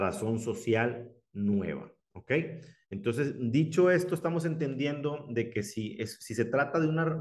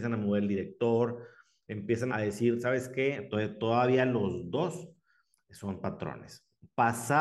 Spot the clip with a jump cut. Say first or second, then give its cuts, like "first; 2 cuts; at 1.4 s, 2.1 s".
second; 2 cuts; at 2.1 s, 3.3 s